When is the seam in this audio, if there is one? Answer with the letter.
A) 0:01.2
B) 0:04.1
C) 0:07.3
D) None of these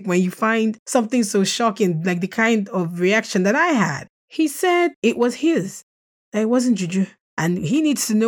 C